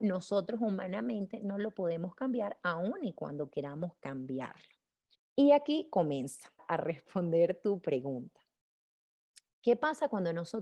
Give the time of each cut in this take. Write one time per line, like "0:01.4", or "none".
0:05.1
0:06.6